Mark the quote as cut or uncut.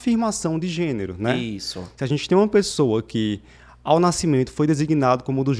uncut